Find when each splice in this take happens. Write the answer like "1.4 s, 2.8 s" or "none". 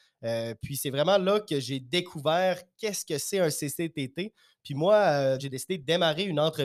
5.4 s